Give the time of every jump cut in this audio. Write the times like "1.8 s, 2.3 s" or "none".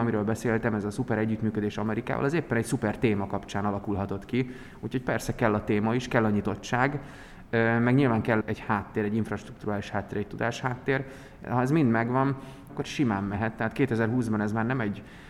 8.4 s, 12.7 s